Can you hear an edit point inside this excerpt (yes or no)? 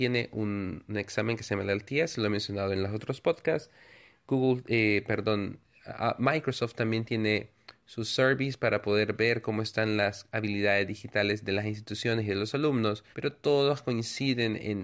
yes